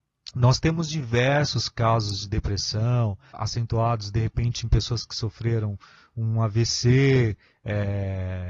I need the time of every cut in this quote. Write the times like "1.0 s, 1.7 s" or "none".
3.3 s